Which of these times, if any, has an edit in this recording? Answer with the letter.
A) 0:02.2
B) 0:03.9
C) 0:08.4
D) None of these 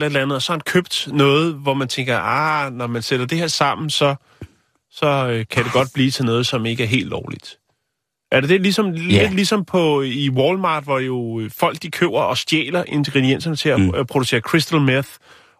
D